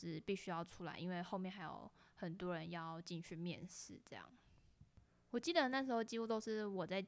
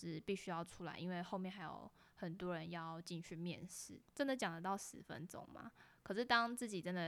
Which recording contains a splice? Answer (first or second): second